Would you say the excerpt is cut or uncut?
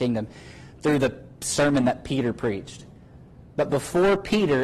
uncut